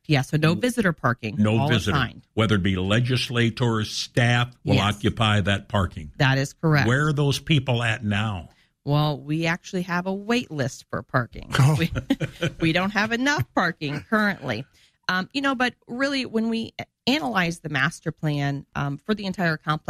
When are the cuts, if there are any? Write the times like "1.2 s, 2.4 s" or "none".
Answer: 4.5 s